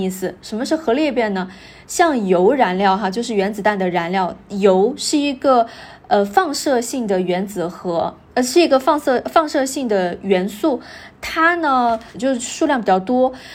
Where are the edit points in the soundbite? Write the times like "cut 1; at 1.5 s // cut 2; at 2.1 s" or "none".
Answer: cut 1; at 12.1 s

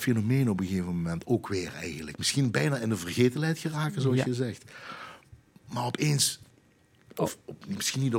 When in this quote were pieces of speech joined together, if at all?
none

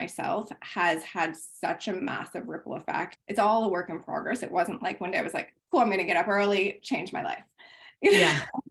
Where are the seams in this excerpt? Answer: cut 1; at 3.2 s

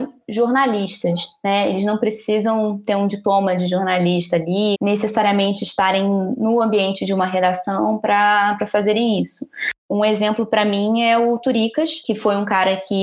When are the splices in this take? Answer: cut 1; at 4.7 s

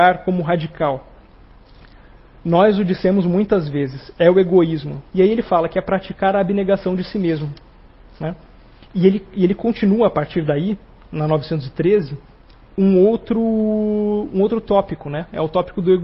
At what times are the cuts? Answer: cut 1; at 5.0 s

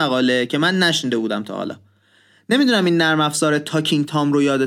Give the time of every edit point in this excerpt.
none

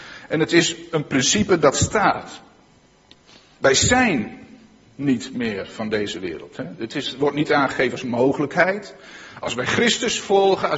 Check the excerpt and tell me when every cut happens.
none

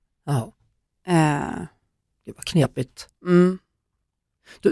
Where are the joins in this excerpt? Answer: none

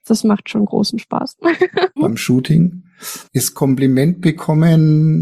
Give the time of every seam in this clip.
cut 1; at 2.0 s // cut 2; at 3.3 s

